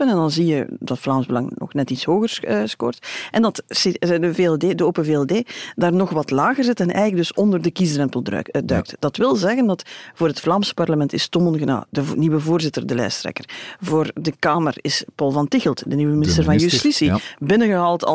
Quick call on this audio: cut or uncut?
uncut